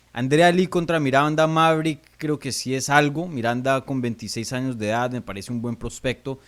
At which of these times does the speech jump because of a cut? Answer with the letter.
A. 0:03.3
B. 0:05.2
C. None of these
C